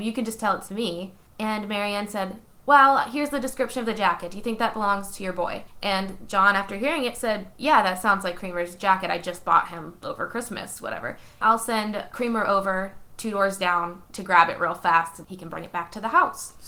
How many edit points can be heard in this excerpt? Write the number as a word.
two